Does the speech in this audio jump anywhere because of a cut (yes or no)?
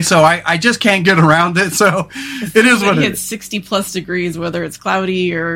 no